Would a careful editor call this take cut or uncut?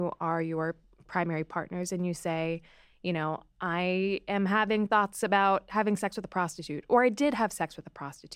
uncut